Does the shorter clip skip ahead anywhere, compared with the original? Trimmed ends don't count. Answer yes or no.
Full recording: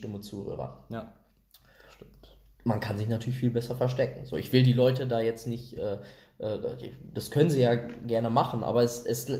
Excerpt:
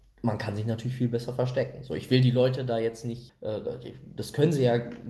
yes